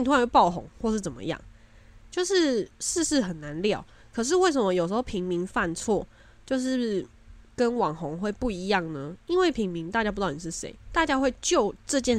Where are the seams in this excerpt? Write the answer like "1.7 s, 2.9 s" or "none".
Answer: none